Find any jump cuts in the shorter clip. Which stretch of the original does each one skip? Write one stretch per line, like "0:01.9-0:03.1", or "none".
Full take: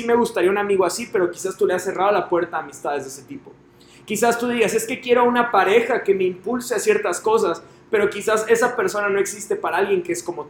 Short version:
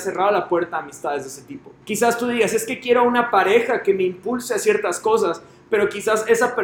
0:03.6-0:04.0